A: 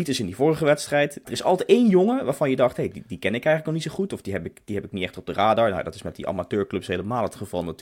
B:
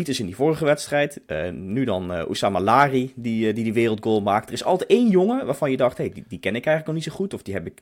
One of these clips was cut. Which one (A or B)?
A